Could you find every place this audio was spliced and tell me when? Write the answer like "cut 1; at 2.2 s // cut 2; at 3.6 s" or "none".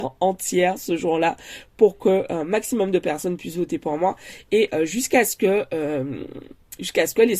none